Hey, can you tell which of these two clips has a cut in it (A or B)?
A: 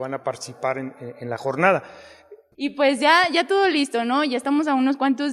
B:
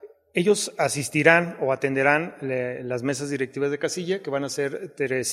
A